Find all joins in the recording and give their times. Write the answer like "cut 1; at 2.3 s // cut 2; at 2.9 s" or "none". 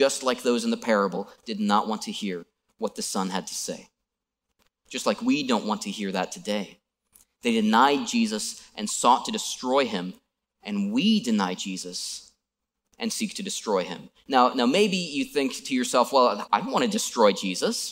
cut 1; at 16.5 s